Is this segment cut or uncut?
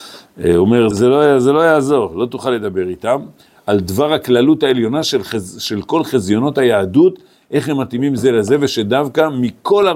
cut